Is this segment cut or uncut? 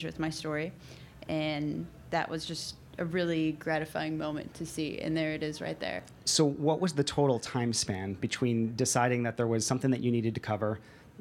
uncut